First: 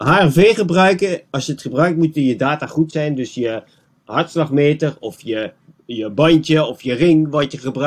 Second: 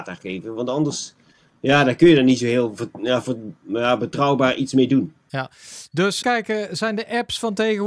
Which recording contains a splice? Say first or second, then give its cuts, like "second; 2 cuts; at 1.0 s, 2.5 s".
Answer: second; 1 cut; at 6.2 s